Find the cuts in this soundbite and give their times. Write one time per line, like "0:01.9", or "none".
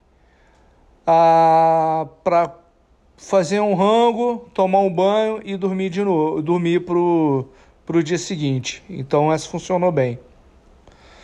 none